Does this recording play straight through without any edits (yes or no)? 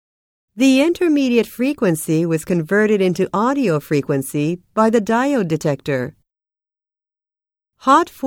yes